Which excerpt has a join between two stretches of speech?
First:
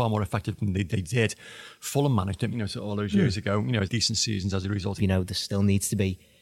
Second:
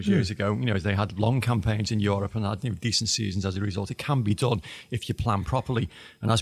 first; 3 cuts; at 2.5 s, 3.9 s, 5.0 s

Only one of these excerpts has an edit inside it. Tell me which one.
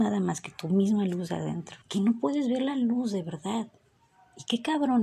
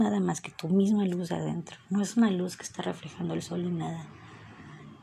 first; 1 cut; at 1.8 s

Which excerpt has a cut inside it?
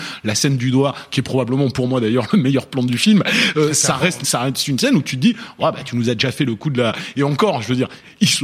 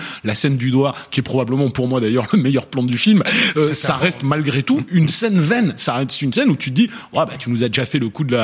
first; 1 cut; at 4.2 s

